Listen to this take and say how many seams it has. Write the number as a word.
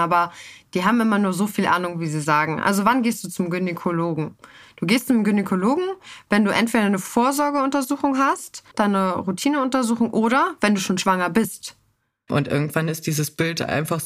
two